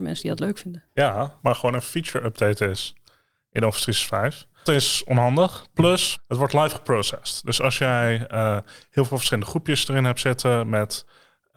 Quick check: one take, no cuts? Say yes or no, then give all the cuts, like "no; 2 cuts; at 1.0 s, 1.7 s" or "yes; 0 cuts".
no; 3 cuts; at 1.4 s, 4.7 s, 6.1 s